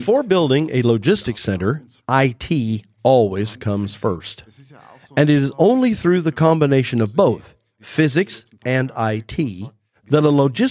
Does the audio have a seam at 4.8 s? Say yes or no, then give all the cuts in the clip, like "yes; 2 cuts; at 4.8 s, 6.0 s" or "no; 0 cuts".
no; 1 cut; at 2.0 s